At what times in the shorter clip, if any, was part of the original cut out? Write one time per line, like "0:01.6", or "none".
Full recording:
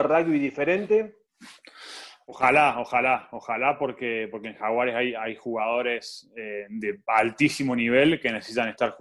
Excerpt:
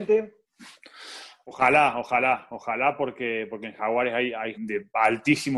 0:04.5